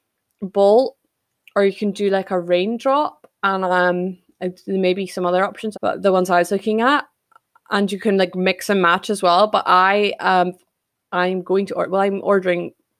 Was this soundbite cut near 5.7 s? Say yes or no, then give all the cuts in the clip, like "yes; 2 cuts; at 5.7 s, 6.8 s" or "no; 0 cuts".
yes; 1 cut; at 5.7 s